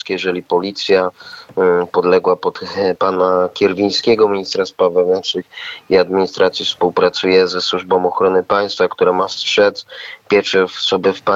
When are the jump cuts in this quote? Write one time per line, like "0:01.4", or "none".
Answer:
none